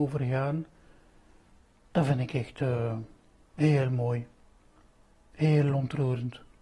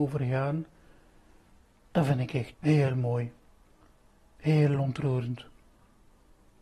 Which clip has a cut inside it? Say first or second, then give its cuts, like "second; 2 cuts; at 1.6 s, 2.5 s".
second; 1 cut; at 2.5 s